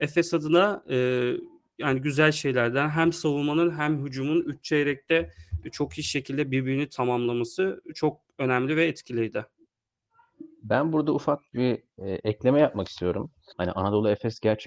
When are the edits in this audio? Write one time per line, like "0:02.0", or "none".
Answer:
0:13.5